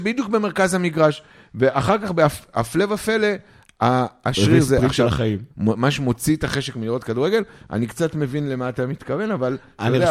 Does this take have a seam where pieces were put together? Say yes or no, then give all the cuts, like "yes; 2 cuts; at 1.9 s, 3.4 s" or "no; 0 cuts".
yes; 1 cut; at 5.5 s